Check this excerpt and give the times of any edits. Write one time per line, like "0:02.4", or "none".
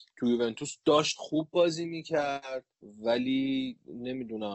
0:02.7